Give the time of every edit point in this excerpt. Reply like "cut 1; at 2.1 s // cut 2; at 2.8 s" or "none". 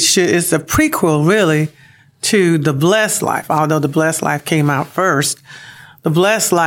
none